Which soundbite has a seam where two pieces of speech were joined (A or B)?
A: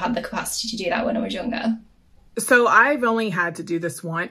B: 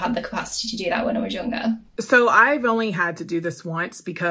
B